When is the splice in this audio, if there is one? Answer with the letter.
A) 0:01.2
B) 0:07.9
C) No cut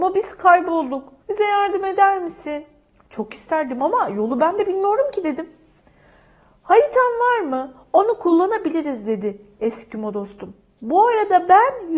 A